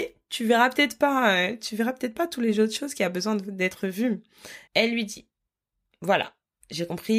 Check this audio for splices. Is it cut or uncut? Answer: cut